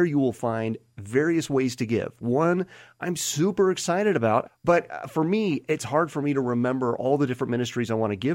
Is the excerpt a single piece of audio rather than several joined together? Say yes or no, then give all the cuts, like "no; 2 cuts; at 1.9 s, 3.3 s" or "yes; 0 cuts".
no; 1 cut; at 4.5 s